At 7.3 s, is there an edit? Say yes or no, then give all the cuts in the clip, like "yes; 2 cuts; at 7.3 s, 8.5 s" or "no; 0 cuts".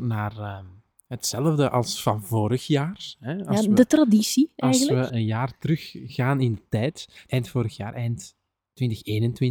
yes; 2 cuts; at 5.1 s, 7.3 s